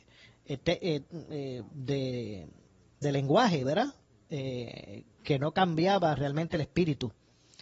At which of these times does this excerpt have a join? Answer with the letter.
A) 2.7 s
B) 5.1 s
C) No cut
B